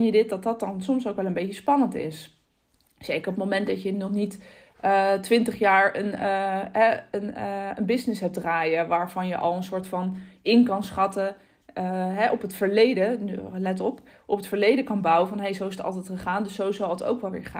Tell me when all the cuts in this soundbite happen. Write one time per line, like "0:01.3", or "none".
none